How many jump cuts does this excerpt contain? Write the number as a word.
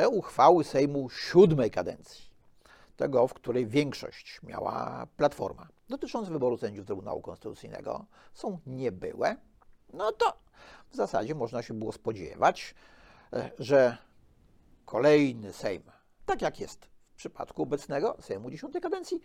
one